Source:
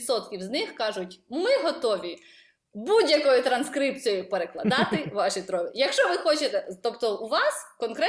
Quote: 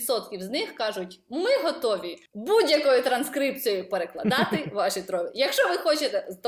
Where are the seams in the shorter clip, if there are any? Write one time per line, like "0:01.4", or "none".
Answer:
0:02.3